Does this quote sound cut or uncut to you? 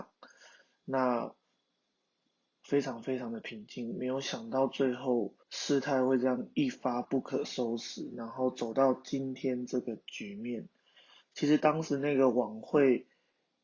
cut